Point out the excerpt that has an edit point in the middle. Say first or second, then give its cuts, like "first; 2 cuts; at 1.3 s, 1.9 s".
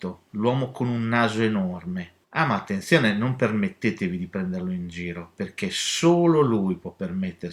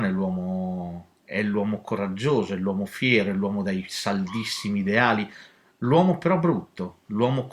first; 1 cut; at 2.2 s